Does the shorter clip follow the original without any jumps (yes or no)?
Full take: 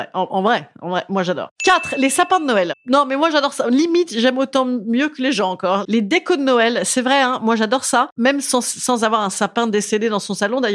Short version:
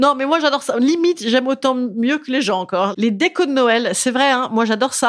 yes